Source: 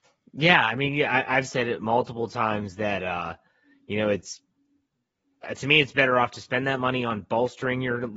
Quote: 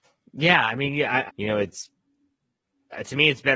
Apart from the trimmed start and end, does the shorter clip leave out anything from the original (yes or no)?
yes